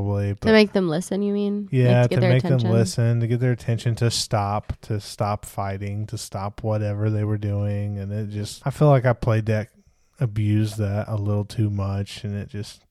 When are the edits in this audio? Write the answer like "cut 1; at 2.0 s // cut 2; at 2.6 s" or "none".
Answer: cut 1; at 8.6 s